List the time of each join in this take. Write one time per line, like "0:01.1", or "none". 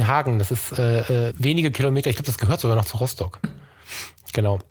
0:01.3
0:03.4